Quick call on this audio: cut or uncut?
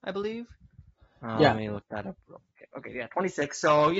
uncut